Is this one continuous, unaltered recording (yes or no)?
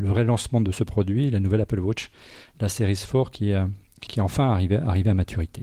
no